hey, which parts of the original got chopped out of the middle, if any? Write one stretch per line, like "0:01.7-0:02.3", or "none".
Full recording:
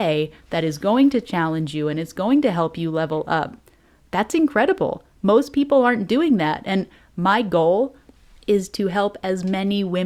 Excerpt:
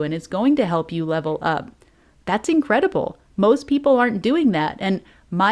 none